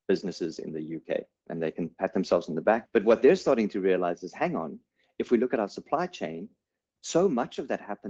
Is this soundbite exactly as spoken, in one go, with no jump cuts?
no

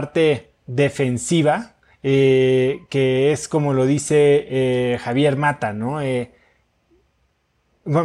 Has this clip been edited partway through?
no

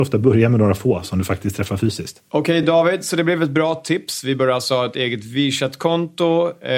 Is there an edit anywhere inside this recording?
no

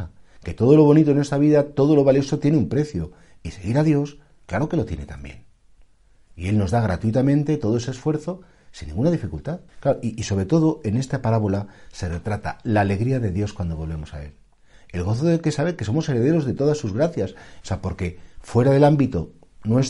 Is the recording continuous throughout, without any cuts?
no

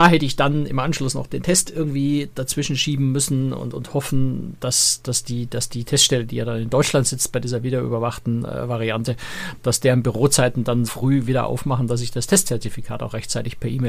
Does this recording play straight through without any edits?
no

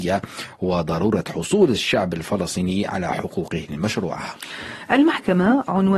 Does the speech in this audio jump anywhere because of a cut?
no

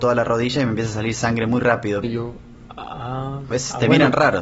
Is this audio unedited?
no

